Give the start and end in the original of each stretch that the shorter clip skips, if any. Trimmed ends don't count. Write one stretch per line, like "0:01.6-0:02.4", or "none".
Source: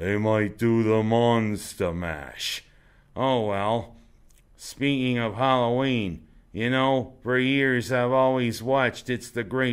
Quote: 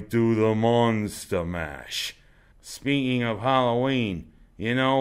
0:03.0-0:04.5